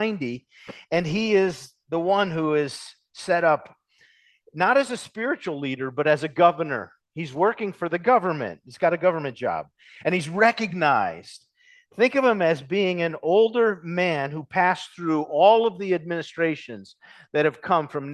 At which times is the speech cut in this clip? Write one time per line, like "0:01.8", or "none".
none